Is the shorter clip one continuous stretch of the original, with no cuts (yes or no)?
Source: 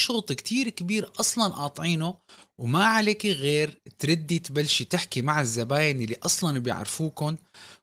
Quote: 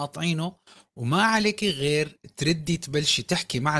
yes